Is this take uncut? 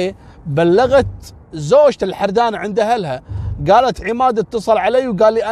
yes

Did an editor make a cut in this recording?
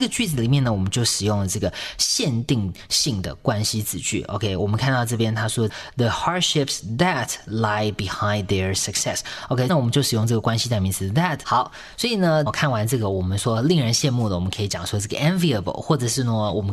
yes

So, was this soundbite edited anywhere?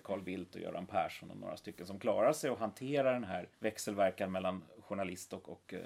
yes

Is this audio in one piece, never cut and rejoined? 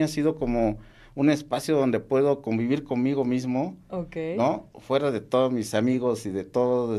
yes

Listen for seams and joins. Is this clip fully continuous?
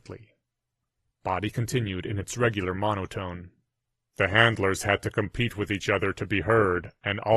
yes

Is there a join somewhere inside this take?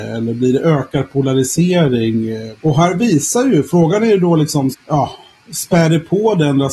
yes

